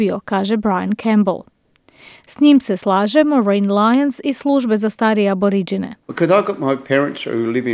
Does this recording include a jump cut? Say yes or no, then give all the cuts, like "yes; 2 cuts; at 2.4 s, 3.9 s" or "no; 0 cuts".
yes; 1 cut; at 6.0 s